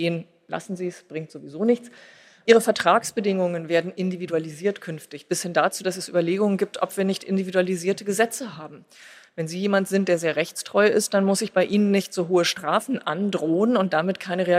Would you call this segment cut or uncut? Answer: uncut